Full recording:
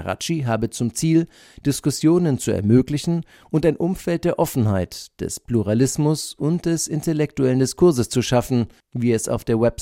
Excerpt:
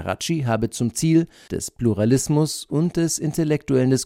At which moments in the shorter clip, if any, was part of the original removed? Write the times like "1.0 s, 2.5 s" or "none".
1.5 s